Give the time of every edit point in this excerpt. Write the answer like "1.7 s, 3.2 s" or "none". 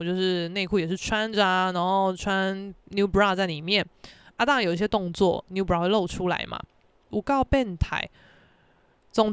7.1 s